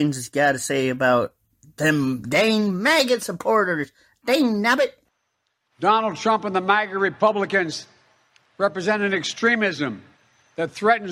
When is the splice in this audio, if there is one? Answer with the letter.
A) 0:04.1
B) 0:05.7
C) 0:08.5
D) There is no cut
B